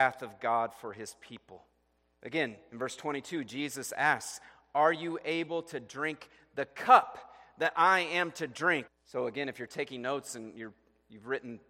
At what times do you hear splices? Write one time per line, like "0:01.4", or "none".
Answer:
0:02.1
0:08.9